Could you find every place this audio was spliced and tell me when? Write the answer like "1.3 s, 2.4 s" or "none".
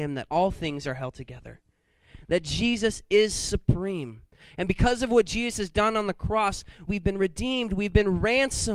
6.9 s